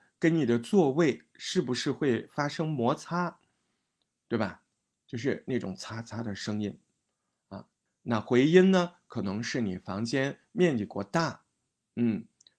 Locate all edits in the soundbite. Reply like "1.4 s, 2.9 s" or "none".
7.9 s